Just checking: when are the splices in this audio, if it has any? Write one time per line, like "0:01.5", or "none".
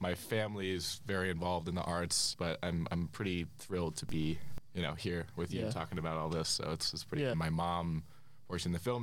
0:02.3
0:07.3

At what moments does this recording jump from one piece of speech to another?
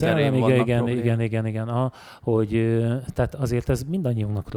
none

